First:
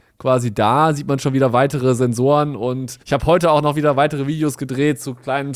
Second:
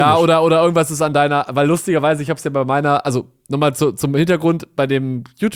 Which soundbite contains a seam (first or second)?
first